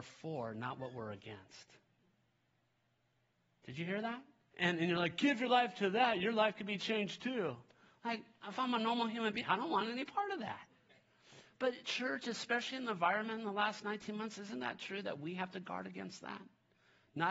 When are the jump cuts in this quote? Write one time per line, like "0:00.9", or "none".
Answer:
0:04.5
0:09.4